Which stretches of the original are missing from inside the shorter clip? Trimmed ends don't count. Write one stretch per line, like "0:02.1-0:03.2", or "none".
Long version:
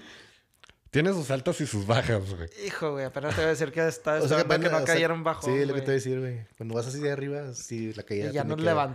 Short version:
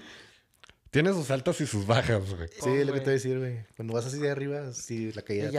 0:02.6-0:05.4